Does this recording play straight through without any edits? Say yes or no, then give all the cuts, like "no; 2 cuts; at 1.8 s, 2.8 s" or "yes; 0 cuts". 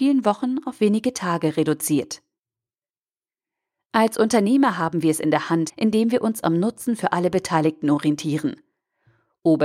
no; 1 cut; at 5.7 s